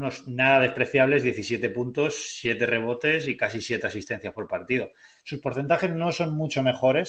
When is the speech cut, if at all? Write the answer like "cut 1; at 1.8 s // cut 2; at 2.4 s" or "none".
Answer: none